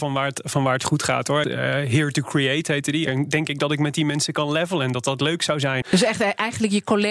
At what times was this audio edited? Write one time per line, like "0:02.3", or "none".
0:01.4
0:03.1
0:05.8